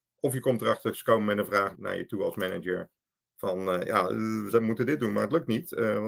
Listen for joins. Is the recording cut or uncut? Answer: cut